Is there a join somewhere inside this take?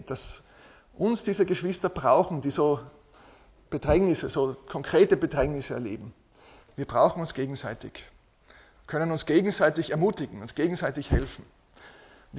yes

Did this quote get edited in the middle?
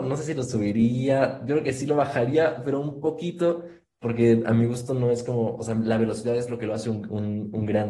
no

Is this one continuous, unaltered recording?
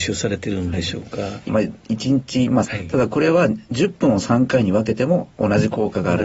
no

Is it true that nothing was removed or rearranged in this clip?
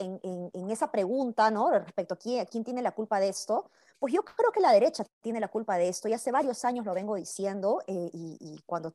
yes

